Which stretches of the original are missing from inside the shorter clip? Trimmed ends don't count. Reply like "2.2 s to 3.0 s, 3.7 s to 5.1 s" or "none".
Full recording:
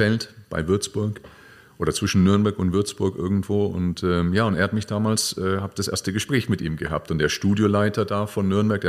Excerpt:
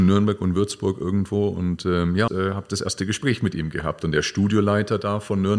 4.5 s to 5.3 s